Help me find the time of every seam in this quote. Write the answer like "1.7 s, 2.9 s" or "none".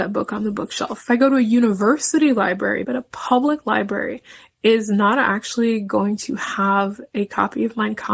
2.8 s